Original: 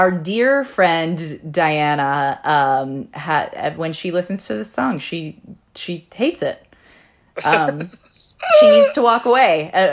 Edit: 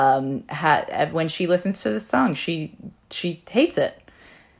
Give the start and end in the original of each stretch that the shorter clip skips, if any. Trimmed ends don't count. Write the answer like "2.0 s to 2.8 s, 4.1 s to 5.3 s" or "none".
none